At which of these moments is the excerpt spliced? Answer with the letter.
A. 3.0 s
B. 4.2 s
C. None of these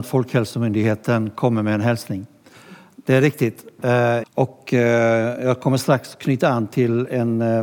B